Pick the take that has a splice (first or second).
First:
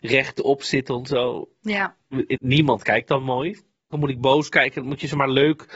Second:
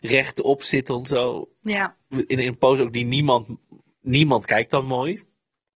first